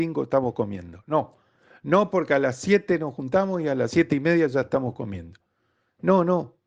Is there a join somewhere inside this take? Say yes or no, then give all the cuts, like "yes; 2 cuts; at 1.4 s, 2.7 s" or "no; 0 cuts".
no; 0 cuts